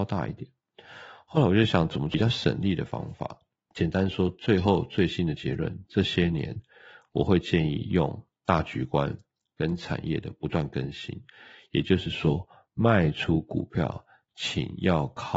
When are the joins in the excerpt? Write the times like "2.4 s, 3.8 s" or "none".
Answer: none